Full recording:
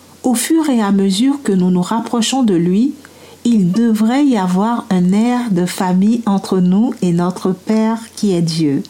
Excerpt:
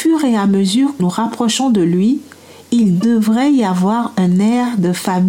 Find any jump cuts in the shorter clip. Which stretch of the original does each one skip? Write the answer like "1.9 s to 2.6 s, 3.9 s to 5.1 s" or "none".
1.4 s to 1.7 s